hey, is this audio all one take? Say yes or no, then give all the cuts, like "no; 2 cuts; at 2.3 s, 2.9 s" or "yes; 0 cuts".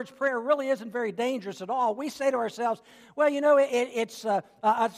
yes; 0 cuts